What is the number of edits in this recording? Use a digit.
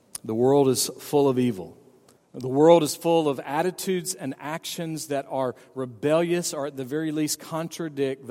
1